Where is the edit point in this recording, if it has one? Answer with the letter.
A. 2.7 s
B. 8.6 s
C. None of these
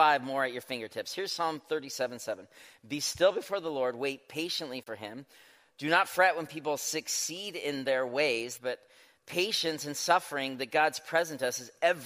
B